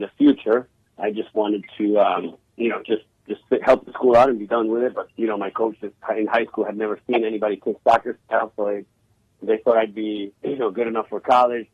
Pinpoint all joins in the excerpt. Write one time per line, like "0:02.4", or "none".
0:05.1